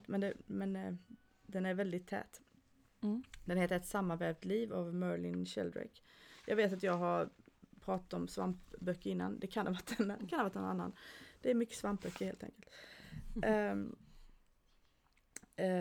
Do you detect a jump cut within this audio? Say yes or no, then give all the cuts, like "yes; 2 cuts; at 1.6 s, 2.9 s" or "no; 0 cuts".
no; 0 cuts